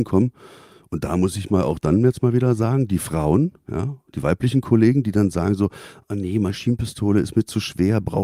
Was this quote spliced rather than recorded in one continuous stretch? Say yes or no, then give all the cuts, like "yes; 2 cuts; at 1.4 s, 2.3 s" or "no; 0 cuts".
no; 0 cuts